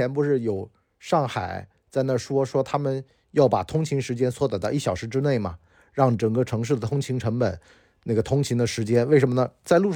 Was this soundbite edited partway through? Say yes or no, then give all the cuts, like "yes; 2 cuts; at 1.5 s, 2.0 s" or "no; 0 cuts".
no; 0 cuts